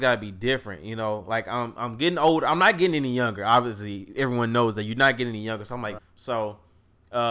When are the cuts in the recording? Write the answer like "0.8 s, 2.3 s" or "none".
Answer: 6.0 s